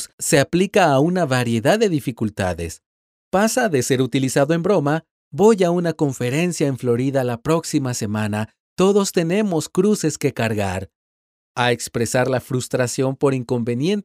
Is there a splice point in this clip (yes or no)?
no